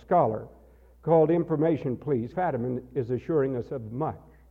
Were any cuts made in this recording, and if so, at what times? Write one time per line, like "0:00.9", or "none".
0:02.3